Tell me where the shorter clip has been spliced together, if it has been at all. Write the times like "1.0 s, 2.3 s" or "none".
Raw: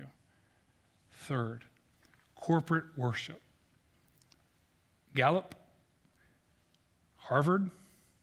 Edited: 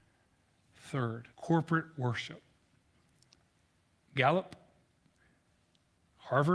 1.3 s